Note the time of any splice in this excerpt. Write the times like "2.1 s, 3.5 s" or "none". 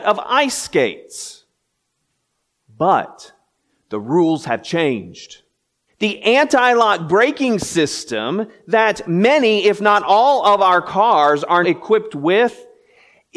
5.9 s, 11.6 s